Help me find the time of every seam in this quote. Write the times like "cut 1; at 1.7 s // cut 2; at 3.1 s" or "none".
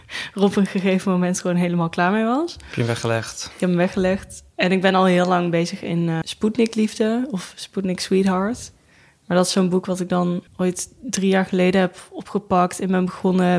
cut 1; at 6.2 s // cut 2; at 10.5 s